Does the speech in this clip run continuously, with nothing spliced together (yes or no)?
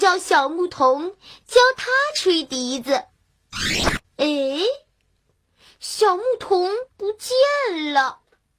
no